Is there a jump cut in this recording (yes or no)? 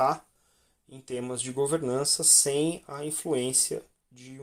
no